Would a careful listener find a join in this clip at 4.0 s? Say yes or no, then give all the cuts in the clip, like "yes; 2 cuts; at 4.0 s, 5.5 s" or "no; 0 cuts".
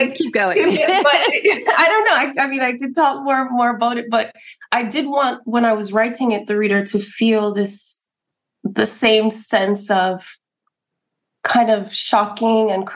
no; 0 cuts